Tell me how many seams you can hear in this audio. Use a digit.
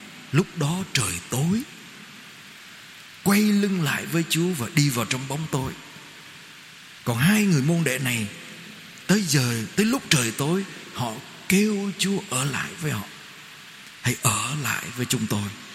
1